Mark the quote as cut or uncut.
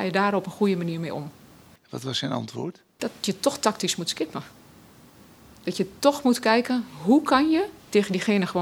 uncut